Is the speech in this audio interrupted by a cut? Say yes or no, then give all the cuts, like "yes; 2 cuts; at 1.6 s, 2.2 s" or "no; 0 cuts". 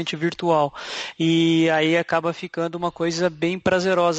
no; 0 cuts